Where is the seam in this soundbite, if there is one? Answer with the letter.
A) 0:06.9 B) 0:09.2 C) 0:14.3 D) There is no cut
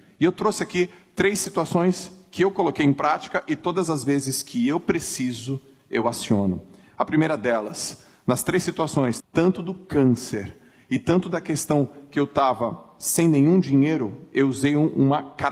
B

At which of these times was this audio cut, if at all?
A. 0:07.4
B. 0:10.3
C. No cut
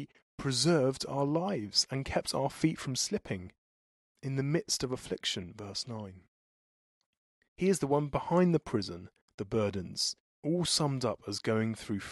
B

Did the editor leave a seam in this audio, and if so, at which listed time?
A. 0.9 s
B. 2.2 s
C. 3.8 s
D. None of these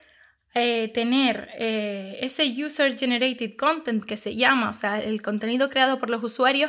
D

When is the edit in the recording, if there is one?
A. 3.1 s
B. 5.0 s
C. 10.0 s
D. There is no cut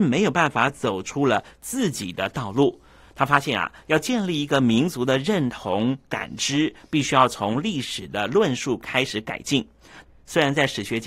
C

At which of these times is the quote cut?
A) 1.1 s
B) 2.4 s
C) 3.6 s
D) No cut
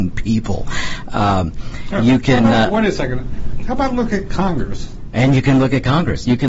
D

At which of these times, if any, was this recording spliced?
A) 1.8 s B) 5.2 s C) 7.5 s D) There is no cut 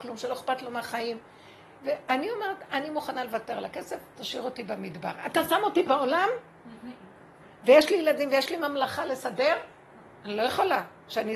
D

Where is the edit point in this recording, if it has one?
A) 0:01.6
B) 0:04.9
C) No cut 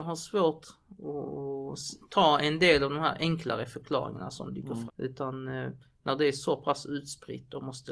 B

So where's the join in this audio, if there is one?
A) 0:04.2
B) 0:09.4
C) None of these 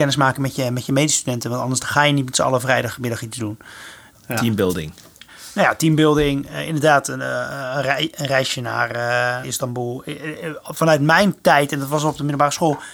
B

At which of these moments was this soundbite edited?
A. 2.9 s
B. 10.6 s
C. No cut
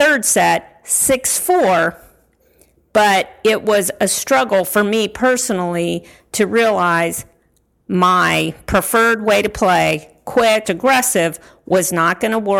B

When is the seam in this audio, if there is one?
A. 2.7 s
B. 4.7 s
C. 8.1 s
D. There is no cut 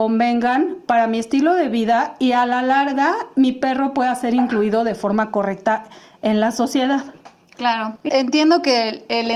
C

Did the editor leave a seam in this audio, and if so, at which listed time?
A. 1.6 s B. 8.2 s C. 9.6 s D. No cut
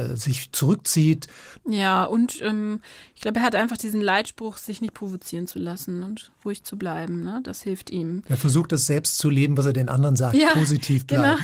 A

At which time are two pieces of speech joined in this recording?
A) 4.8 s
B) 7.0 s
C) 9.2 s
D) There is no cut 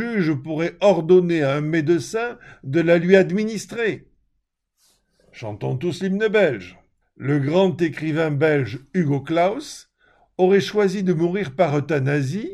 B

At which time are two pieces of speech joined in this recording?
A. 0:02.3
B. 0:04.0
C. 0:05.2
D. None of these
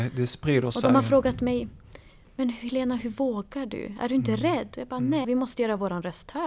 C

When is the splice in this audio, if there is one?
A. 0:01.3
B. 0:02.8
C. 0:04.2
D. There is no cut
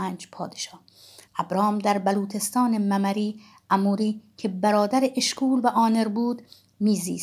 A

